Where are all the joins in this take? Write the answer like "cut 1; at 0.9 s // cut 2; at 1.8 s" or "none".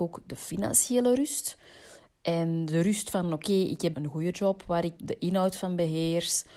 cut 1; at 3.9 s // cut 2; at 5.0 s